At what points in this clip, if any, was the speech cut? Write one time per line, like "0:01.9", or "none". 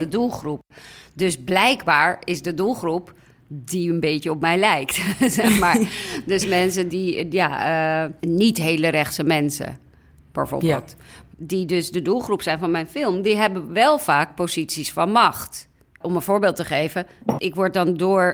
0:06.9
0:11.3
0:17.4